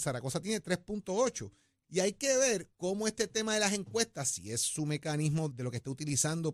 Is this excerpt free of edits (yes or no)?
no